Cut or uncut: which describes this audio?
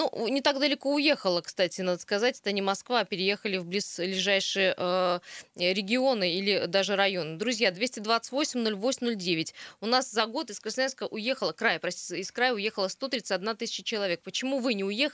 uncut